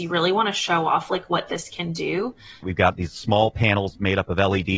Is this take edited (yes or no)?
yes